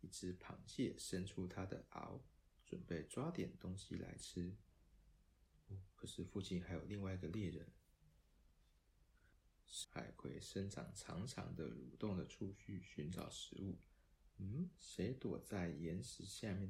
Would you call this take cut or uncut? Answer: cut